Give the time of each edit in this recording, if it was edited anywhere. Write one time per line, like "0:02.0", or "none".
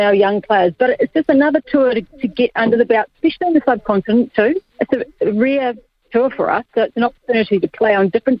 0:04.7